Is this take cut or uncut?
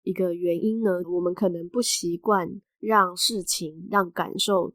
cut